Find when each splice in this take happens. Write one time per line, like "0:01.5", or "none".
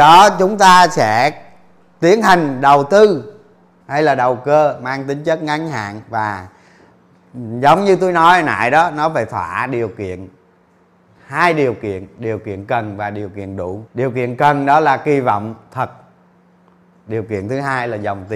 0:13.9